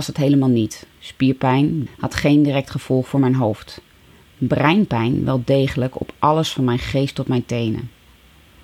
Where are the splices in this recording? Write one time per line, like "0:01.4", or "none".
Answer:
0:01.9

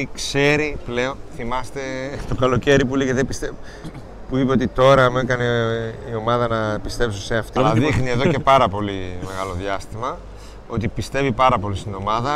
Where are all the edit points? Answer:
0:07.6

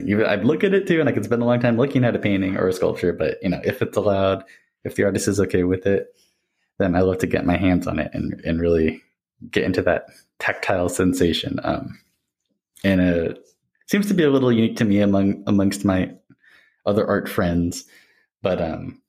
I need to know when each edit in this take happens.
none

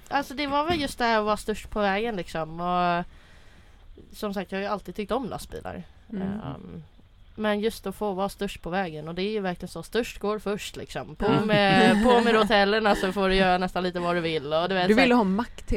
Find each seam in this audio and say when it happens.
none

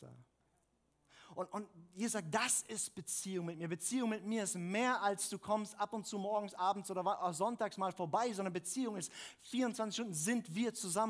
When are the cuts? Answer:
none

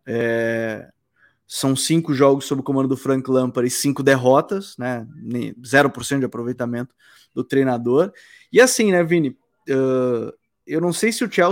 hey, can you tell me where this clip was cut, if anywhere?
none

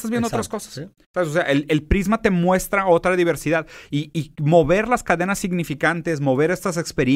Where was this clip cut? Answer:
none

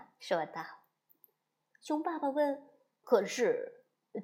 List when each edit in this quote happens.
0:03.0

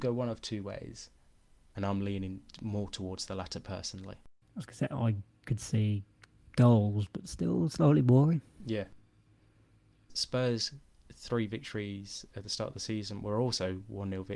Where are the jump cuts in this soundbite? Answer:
0:01.7
0:10.1

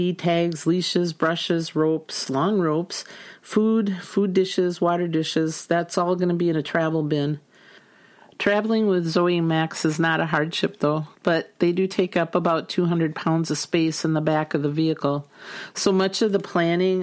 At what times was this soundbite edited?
0:11.2

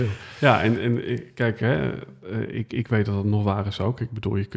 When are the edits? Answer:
none

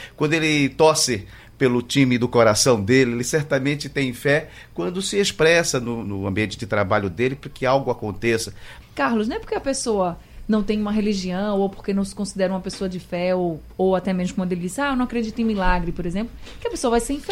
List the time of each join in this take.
0:06.0
0:08.8

